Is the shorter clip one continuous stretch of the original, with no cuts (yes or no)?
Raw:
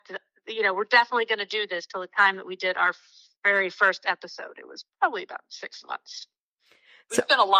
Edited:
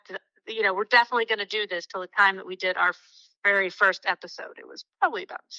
yes